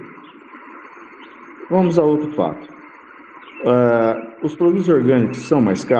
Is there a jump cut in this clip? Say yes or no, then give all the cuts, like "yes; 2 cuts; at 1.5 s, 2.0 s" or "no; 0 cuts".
no; 0 cuts